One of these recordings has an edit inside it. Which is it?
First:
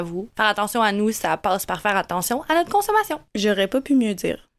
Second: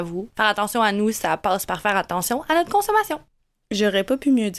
first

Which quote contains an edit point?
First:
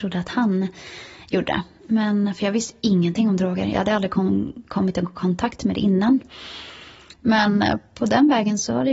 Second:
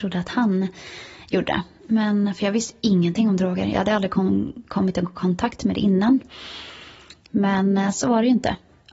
first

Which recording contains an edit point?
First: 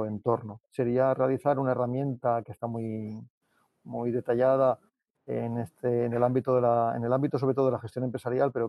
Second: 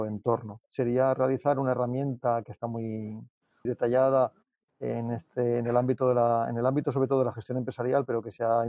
second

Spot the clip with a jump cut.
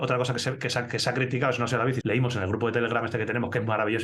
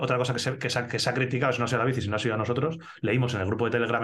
first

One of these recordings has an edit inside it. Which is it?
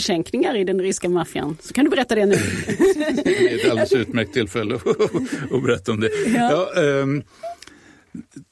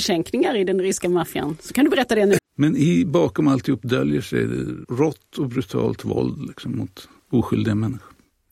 second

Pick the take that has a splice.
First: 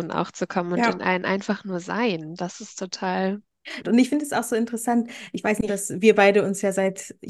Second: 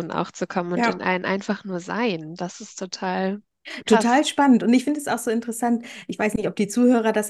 first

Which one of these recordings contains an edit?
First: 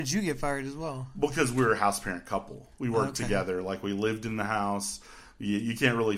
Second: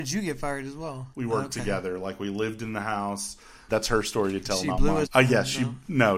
second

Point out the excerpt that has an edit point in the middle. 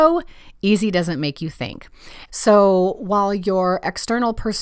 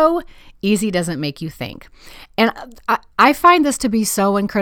first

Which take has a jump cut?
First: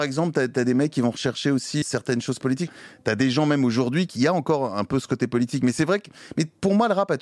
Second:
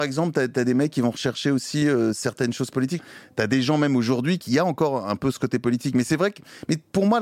first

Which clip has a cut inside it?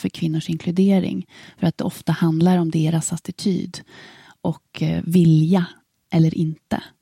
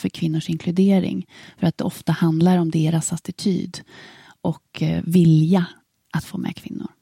second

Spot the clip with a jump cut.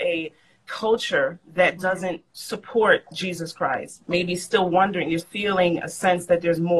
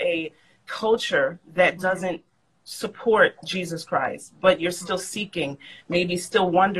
first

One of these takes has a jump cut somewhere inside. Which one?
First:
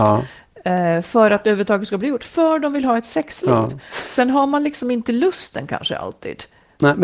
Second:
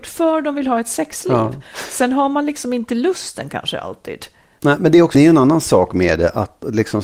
second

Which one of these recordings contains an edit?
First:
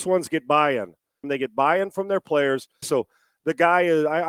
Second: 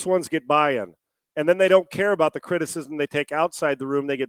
first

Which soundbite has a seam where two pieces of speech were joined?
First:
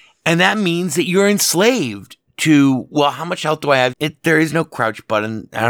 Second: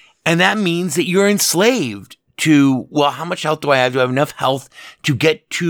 first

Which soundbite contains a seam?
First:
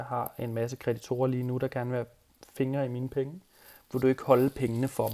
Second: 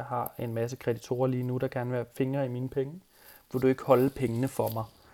second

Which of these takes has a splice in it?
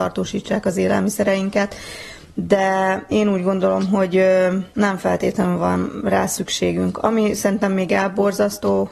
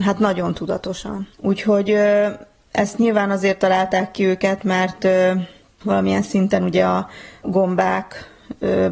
second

